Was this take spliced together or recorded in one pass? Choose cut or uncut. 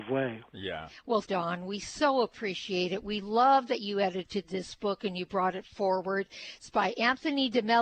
cut